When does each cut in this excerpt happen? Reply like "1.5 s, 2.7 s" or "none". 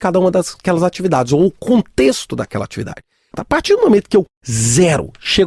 3.3 s